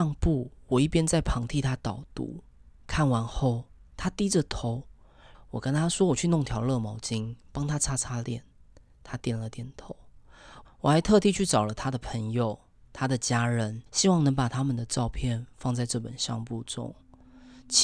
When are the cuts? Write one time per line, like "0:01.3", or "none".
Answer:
0:05.3
0:10.6
0:13.9